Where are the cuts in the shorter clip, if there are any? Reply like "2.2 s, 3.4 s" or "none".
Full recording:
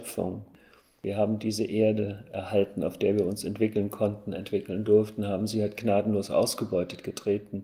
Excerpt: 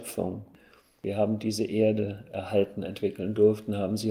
2.8 s